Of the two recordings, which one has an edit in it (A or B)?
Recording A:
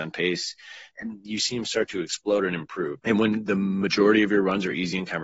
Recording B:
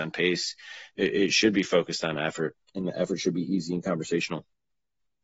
A